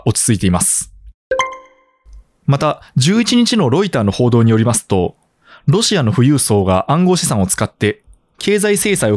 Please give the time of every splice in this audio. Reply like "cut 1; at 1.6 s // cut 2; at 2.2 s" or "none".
none